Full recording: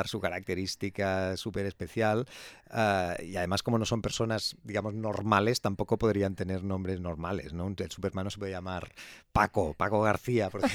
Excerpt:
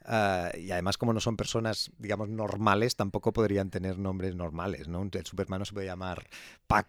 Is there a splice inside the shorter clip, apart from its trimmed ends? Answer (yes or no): no